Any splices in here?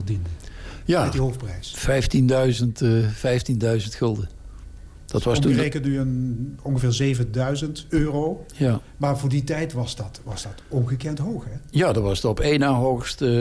no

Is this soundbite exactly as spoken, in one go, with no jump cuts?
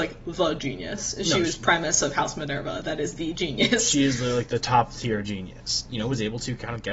no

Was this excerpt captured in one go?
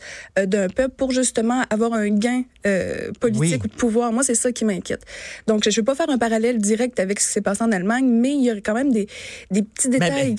yes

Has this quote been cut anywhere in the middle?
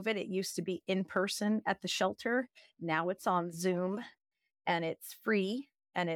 no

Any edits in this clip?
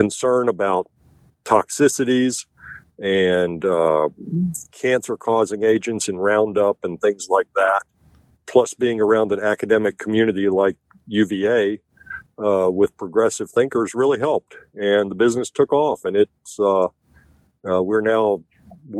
no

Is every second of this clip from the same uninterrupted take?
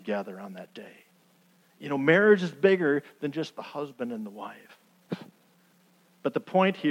no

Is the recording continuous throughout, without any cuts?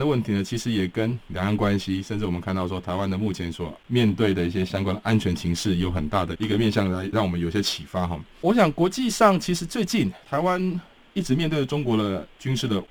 yes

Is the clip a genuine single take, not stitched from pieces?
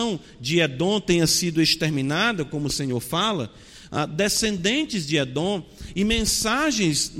yes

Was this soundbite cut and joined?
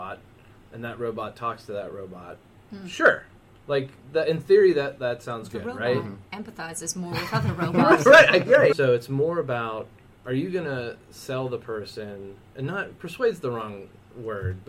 yes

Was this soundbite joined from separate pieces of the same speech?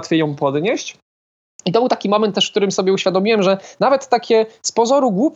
no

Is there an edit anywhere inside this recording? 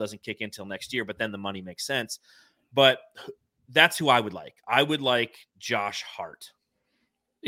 no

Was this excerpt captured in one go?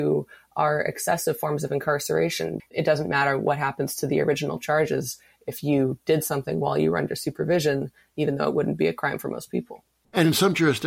no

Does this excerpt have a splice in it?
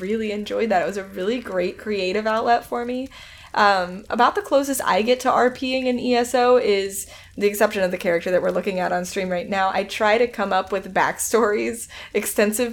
no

